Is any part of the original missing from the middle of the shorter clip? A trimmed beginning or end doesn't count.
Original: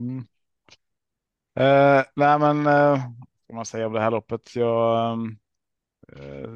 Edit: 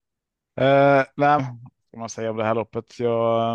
yes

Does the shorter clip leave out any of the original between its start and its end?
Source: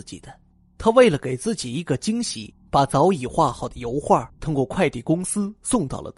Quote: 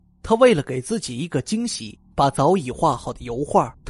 no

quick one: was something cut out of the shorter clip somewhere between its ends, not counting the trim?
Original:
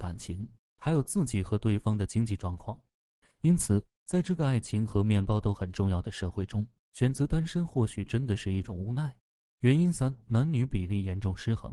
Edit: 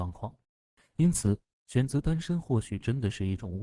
yes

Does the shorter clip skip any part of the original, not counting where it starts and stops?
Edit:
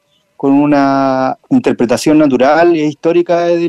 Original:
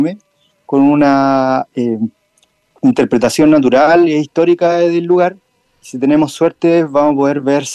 yes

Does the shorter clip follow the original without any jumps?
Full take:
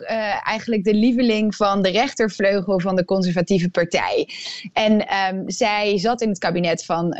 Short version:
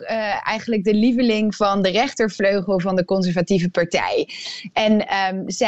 yes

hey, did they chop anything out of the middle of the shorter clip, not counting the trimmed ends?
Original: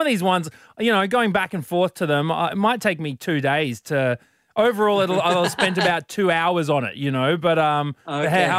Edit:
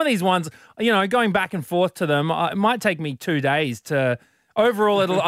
no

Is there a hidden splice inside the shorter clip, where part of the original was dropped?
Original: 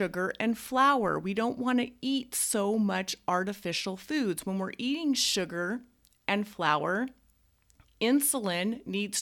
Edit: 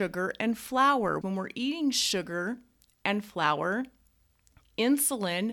yes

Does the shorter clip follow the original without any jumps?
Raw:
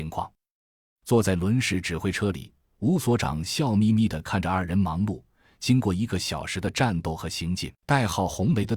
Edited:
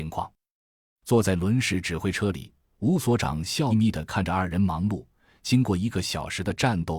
no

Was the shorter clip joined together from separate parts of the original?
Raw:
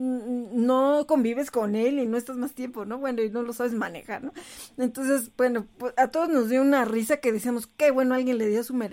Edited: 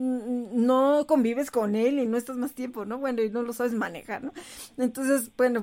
no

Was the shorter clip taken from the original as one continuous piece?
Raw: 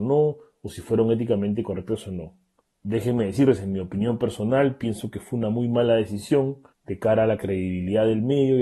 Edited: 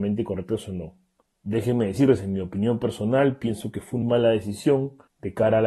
no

